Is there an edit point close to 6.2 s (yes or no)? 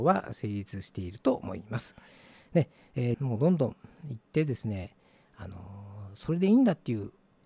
no